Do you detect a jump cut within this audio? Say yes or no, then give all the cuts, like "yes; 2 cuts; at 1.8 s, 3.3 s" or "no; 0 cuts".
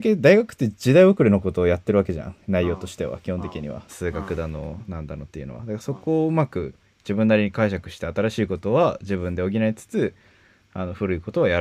yes; 1 cut; at 3.9 s